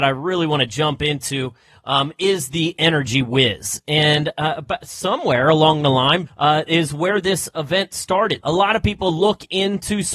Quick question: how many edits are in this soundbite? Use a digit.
2